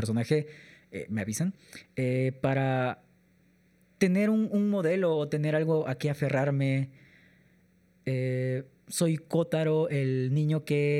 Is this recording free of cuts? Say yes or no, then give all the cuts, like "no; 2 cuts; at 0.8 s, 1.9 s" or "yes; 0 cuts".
yes; 0 cuts